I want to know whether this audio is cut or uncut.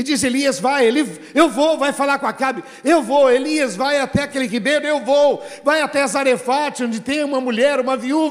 uncut